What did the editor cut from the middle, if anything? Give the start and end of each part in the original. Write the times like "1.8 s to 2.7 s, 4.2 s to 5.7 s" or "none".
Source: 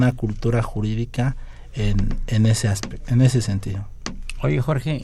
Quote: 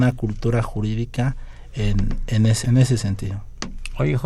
2.6 s to 3.1 s

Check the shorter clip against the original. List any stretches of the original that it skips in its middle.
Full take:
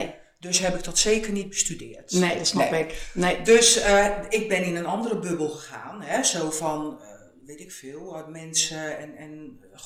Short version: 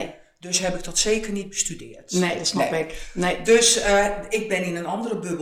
none

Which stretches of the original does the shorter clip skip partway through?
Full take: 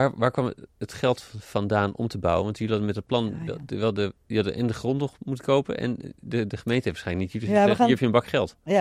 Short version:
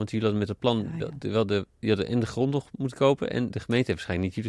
6.0 s to 6.5 s

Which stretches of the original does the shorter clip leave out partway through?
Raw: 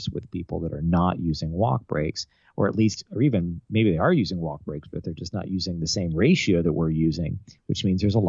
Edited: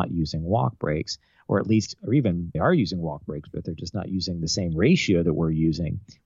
3.6 s to 3.9 s

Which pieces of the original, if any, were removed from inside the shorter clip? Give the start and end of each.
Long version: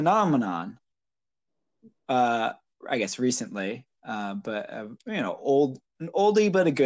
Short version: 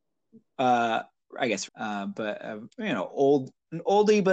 3.2 s to 4.0 s

